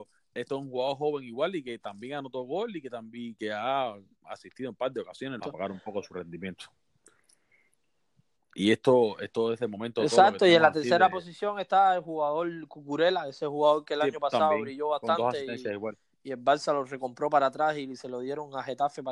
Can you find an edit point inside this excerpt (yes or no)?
yes